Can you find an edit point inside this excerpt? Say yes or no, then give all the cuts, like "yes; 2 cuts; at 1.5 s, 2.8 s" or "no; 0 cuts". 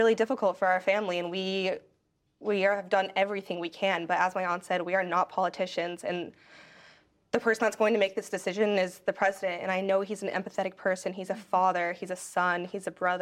no; 0 cuts